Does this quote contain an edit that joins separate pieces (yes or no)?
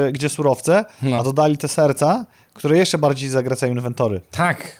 no